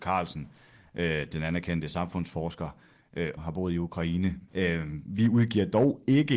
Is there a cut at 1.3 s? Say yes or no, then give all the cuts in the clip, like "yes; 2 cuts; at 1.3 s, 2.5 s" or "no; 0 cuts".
no; 2 cuts; at 3.4 s, 4.5 s